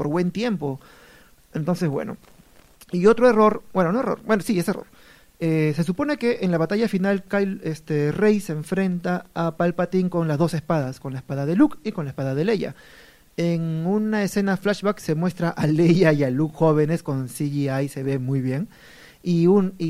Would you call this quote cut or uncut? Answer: uncut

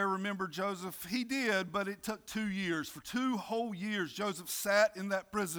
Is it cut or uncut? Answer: uncut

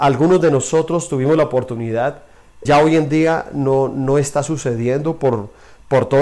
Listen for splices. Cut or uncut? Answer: cut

